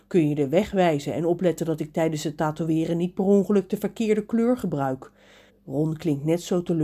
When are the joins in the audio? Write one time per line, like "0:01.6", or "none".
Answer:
0:05.5